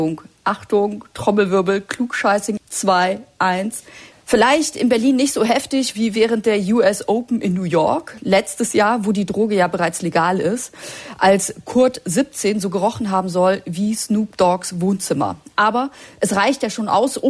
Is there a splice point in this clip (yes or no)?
yes